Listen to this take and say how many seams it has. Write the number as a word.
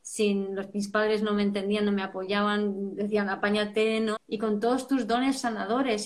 one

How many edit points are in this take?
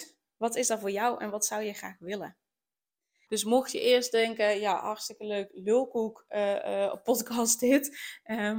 one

